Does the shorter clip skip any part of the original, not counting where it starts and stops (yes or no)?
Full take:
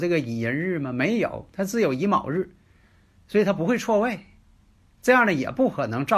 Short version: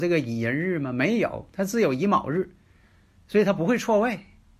no